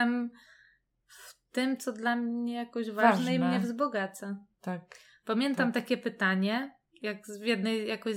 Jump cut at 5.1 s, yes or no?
no